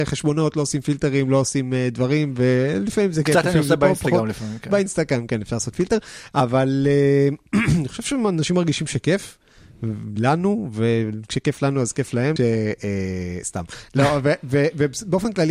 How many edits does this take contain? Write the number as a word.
one